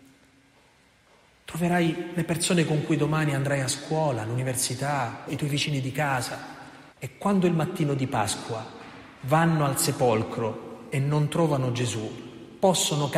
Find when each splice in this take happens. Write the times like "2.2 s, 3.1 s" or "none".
5.3 s, 6.9 s

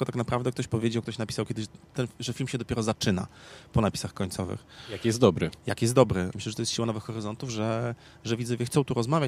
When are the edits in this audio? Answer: 6.3 s

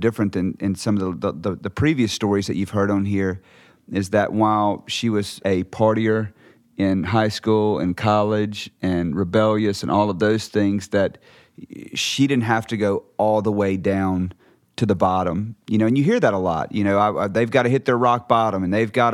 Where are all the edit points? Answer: 5.4 s

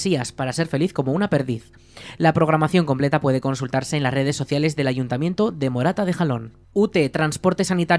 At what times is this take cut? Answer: 6.6 s

